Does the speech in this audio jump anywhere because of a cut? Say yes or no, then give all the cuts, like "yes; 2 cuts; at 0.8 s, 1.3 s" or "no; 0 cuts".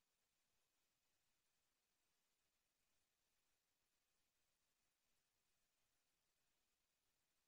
no; 0 cuts